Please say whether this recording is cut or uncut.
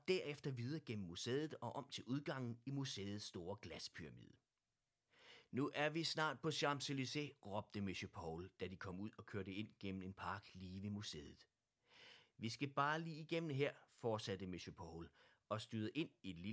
uncut